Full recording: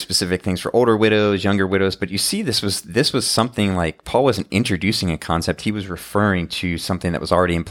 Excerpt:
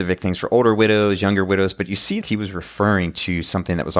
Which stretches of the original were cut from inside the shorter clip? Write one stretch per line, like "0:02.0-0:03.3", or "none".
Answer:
0:02.4-0:05.6